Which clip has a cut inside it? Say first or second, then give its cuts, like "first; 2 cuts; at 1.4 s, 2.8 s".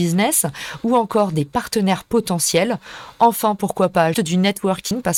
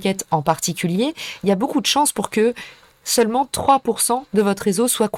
first; 1 cut; at 4.1 s